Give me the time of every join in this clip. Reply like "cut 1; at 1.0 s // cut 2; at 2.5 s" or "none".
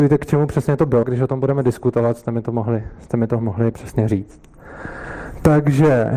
cut 1; at 1.0 s // cut 2; at 3.7 s